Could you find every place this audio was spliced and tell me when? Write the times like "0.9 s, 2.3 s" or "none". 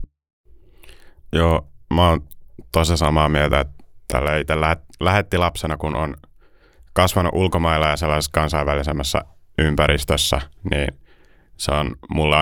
none